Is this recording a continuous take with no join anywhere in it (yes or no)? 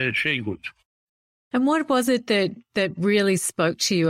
yes